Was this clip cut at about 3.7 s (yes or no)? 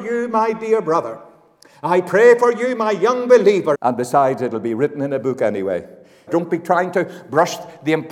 yes